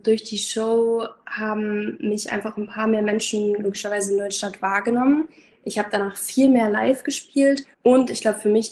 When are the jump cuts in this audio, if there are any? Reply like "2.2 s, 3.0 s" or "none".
7.7 s